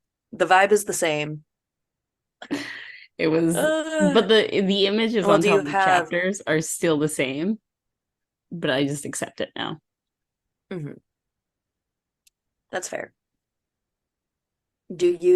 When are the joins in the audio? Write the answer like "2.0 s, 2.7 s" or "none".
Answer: 2.2 s